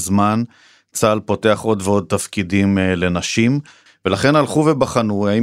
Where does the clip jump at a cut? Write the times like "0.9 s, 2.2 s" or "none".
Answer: 3.9 s